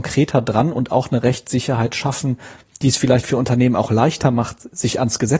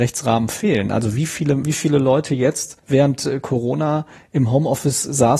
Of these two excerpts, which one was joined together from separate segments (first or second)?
second